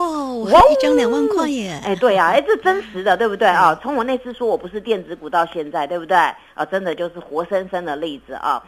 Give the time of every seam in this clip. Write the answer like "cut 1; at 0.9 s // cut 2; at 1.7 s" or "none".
none